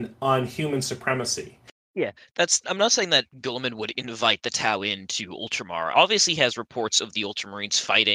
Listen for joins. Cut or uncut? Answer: cut